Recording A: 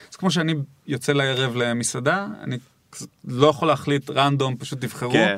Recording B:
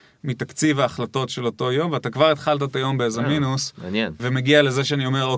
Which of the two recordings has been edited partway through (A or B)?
B